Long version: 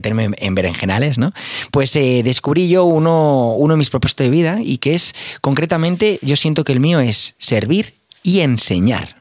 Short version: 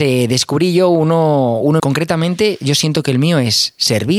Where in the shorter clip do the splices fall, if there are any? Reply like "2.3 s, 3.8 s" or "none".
1.8 s